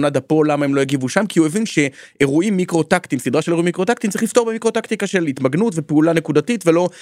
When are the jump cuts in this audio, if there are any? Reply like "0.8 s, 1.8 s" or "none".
none

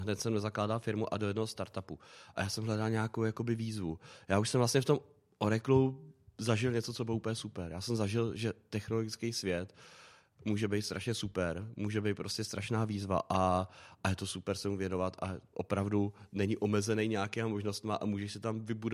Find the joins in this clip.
none

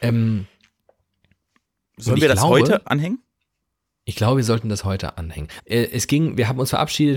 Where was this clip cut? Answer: 2.8 s, 5.6 s

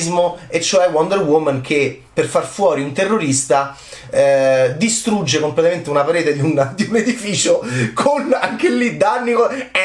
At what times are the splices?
none

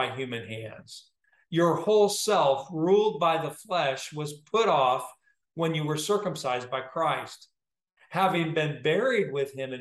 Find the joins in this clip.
none

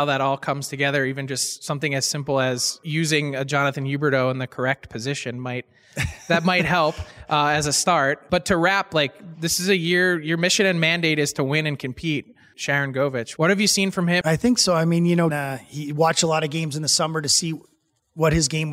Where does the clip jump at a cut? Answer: 12.5 s, 14.2 s, 15.3 s

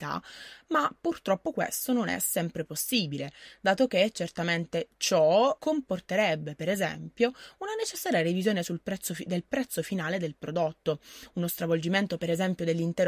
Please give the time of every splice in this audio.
5.6 s

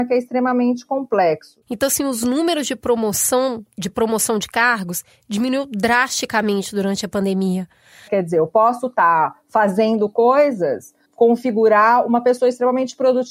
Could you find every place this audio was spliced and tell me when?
1.6 s, 8.1 s, 11.0 s

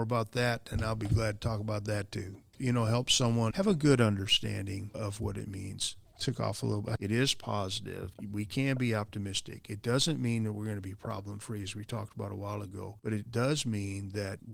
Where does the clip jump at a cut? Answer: 7.0 s

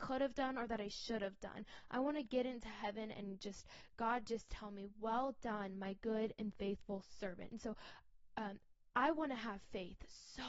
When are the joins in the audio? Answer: none

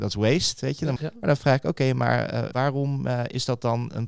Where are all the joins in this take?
1.0 s, 2.5 s

